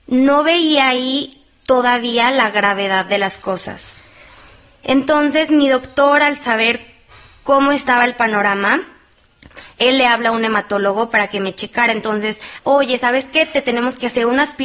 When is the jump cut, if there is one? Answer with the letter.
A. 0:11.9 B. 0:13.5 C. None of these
C